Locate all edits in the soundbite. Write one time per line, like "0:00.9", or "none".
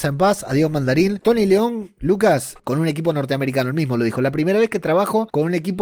0:02.6